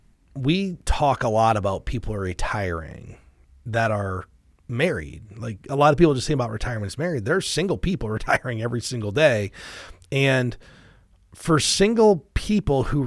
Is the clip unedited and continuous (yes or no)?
yes